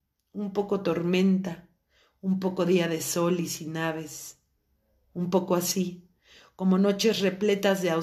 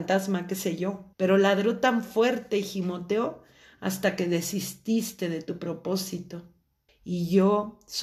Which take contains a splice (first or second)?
second